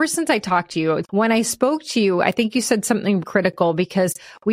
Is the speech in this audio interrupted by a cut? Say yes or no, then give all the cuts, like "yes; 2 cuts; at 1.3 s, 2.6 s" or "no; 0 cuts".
yes; 2 cuts; at 1.0 s, 3.2 s